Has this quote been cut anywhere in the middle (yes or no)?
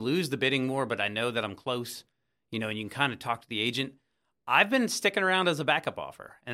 no